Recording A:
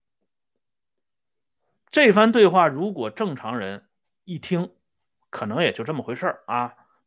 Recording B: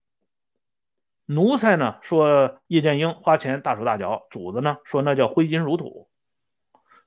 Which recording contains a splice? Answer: B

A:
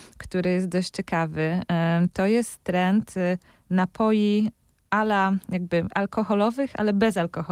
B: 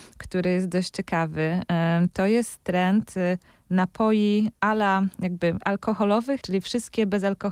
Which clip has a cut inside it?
B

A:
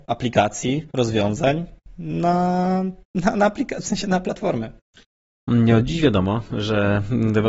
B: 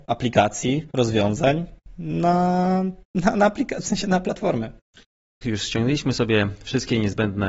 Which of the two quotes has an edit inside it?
B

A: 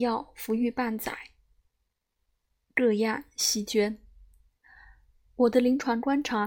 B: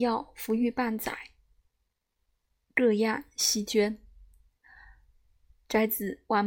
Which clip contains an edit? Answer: A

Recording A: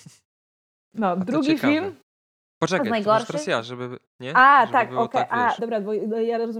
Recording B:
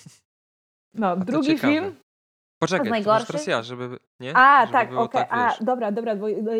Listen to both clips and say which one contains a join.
A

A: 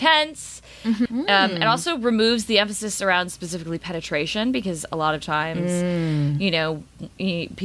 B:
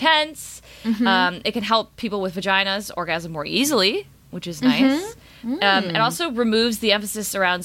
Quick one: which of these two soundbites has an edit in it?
A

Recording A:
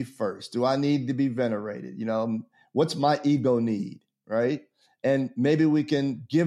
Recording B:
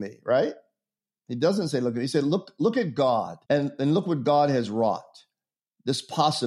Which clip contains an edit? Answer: B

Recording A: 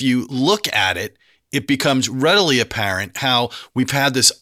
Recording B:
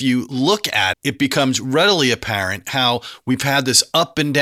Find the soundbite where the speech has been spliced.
B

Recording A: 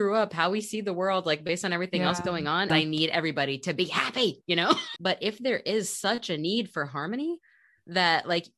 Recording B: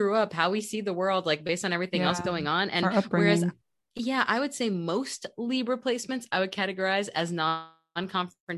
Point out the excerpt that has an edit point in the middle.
A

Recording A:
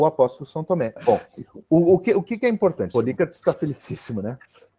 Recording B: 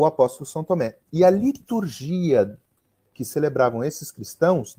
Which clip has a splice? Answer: A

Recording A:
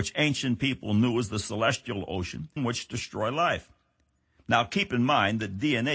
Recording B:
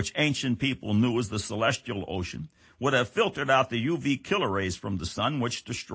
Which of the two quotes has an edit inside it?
A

